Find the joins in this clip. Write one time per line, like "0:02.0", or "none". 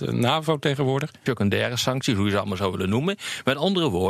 0:01.3